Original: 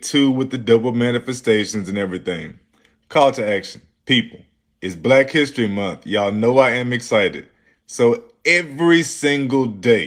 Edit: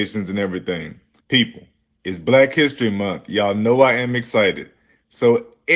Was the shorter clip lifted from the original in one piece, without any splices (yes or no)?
no